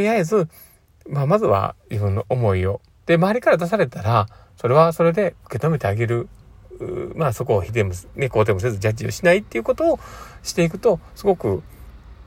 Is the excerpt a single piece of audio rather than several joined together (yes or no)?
no